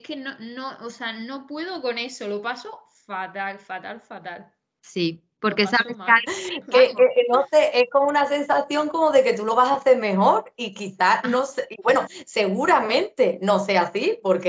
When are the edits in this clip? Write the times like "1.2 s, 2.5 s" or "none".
6.2 s